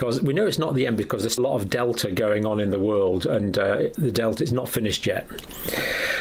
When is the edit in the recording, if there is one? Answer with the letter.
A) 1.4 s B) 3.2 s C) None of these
A